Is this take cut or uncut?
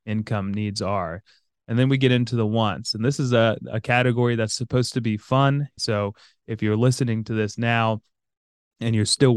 cut